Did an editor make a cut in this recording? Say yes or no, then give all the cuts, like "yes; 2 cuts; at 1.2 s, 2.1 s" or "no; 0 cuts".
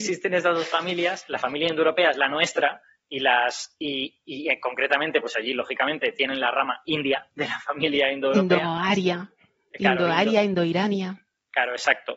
no; 0 cuts